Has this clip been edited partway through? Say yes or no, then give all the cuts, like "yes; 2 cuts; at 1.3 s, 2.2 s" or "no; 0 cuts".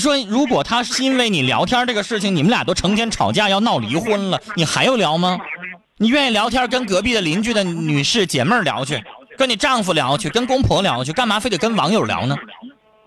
yes; 1 cut; at 5.8 s